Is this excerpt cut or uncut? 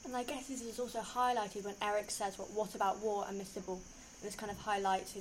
cut